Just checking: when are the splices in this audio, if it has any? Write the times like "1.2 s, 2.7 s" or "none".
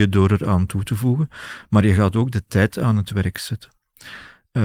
none